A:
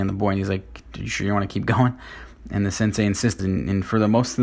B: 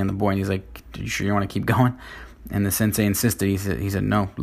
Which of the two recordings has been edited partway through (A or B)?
A